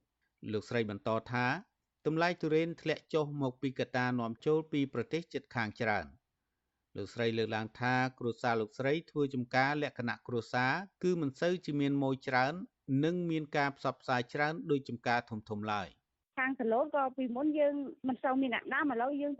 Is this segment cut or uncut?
uncut